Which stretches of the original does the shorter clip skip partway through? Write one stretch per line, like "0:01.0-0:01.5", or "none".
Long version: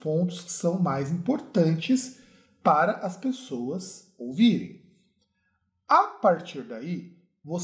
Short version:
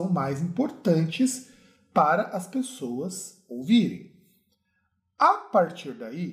none